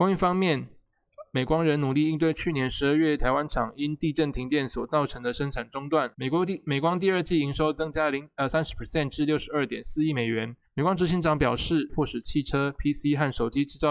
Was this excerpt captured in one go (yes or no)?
no